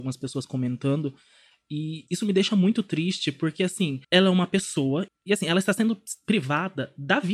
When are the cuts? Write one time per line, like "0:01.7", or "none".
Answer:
0:04.0
0:05.1